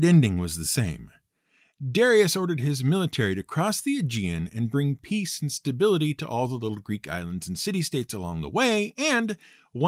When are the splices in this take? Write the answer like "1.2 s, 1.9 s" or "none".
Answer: none